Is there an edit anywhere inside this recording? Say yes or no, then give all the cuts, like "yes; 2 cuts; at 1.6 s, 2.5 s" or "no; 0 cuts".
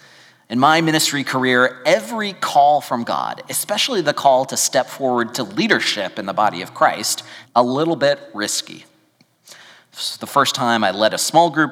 yes; 1 cut; at 7.4 s